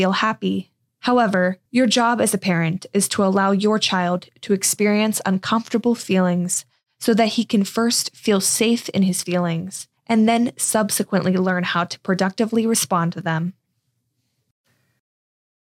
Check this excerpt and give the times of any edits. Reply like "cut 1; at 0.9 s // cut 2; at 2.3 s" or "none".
cut 1; at 1.7 s // cut 2; at 10.0 s